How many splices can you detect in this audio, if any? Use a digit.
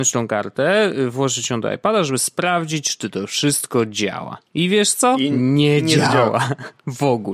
0